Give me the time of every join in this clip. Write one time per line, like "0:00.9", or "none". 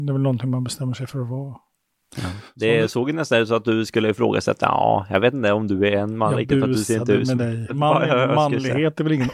0:07.7

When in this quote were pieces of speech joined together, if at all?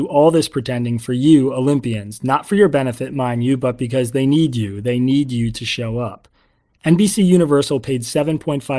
none

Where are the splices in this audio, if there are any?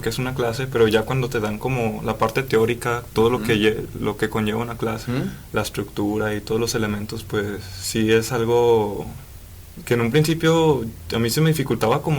0:05.1

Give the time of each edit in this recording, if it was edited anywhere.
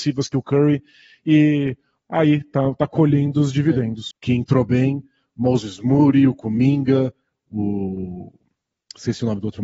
0:04.1

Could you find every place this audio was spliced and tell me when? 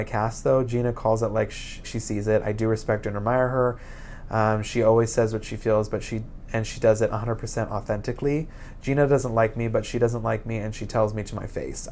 0:01.8

